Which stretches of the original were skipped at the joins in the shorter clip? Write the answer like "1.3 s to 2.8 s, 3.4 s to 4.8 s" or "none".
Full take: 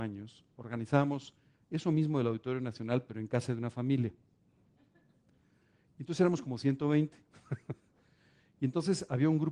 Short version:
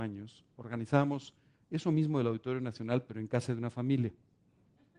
none